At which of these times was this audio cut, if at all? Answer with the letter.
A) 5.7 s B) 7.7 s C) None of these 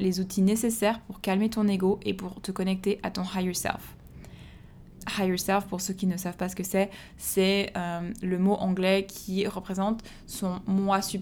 C